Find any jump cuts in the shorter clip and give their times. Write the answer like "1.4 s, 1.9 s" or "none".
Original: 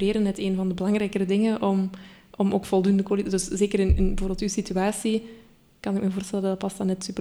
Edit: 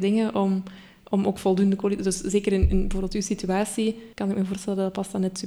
4.1 s

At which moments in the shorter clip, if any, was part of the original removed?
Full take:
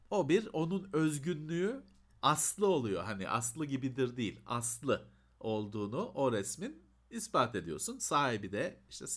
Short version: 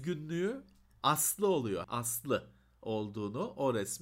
1.8 s

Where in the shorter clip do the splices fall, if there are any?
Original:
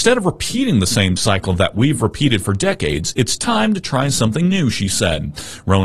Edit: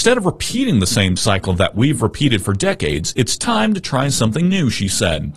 none

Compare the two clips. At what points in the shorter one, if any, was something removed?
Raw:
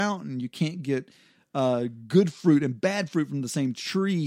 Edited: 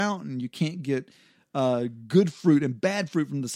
none

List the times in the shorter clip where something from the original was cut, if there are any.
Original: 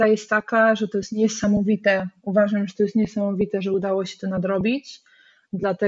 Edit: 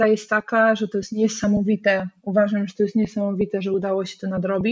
none

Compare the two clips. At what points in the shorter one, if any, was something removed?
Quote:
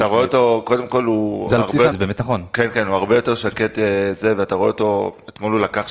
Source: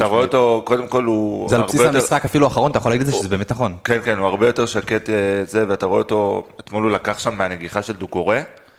1.9 s

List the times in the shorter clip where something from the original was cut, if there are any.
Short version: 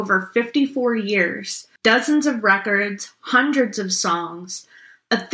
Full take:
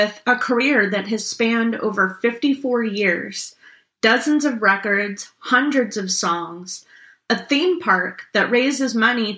1.8 s

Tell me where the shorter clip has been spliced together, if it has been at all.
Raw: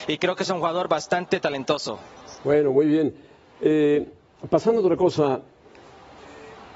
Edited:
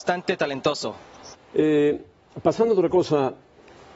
1.3 s

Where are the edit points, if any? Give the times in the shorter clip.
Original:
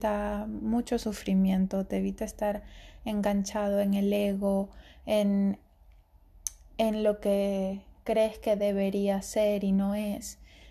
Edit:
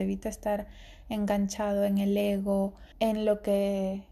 2.9 s

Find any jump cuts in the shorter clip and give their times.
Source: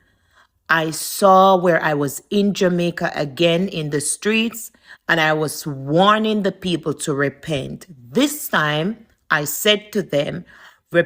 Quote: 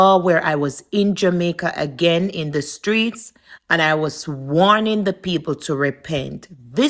none

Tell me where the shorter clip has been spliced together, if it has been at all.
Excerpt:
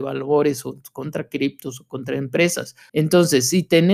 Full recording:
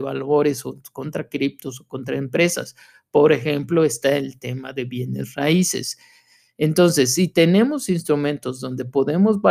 2.9 s

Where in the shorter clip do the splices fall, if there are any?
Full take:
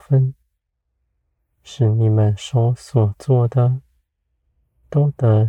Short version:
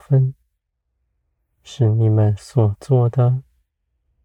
2.4 s

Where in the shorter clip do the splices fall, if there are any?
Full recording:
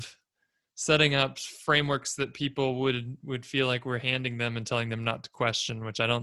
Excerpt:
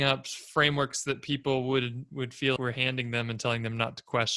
2.6 s

